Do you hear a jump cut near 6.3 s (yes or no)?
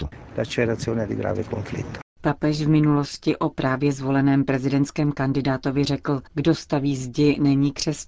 yes